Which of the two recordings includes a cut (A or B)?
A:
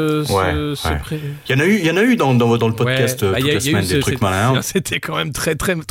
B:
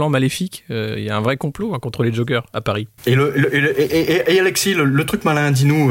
A